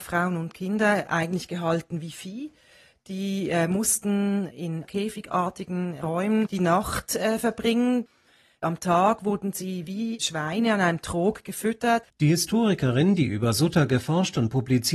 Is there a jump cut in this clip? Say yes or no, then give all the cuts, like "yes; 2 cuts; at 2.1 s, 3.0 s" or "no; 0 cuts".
no; 0 cuts